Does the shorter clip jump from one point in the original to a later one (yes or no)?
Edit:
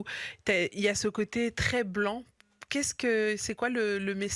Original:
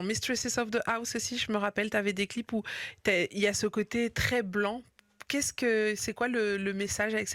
no